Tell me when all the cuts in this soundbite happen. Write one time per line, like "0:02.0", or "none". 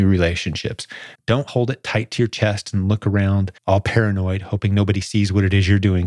0:01.1
0:03.6